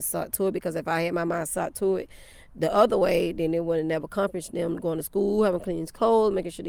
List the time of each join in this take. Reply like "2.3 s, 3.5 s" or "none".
none